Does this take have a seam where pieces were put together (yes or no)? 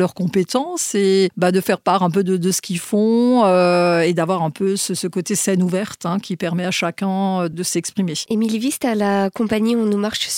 yes